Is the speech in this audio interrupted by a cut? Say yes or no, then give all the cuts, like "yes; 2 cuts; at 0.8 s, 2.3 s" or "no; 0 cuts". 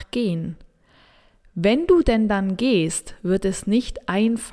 no; 0 cuts